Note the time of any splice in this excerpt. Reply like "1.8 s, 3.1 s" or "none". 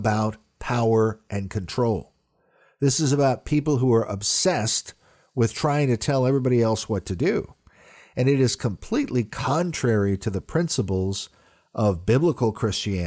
none